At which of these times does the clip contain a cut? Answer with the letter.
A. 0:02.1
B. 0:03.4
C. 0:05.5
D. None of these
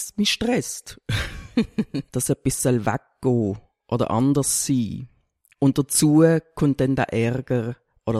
A